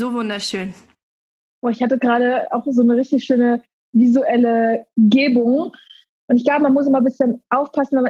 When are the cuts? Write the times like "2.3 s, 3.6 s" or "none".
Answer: 6.1 s